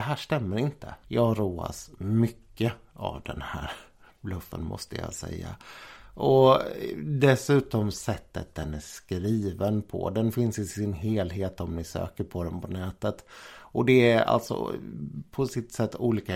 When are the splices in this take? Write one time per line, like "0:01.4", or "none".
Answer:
0:01.0